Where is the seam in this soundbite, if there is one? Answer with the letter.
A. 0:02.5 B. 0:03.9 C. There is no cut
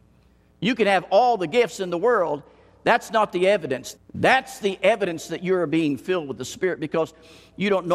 B